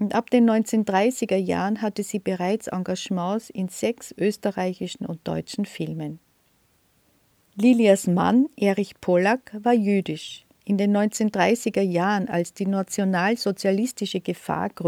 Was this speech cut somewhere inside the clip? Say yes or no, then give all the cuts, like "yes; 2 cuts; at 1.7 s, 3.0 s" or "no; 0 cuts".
no; 0 cuts